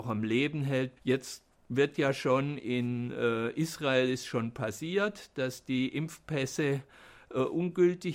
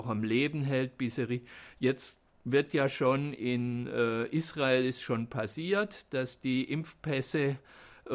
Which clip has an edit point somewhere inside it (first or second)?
first